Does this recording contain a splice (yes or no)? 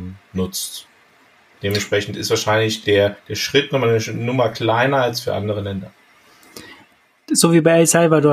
no